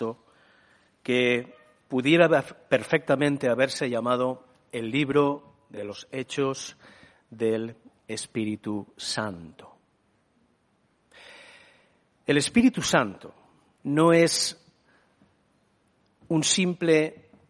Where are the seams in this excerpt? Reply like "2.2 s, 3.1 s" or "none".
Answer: 13.8 s